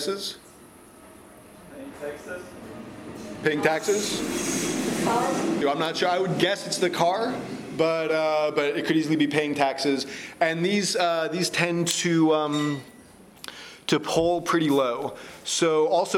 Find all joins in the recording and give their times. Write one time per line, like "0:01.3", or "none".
0:05.6